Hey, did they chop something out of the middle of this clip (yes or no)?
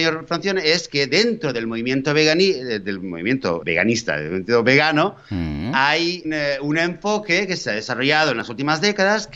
yes